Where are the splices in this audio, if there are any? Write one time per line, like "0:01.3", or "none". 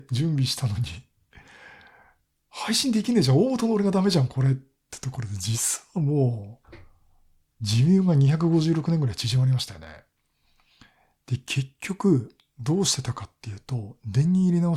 0:06.6